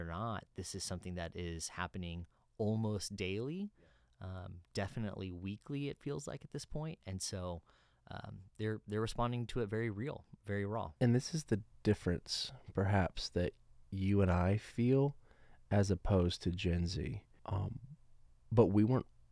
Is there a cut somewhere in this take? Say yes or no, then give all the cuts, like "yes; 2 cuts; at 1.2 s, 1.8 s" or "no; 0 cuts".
yes; 2 cuts; at 11.0 s, 17.4 s